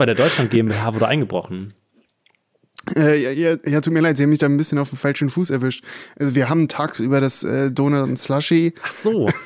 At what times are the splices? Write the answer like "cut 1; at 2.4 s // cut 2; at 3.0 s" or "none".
none